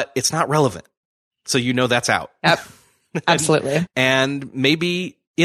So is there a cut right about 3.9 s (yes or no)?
yes